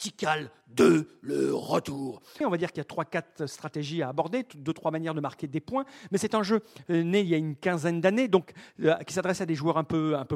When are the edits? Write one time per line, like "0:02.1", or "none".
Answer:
0:02.4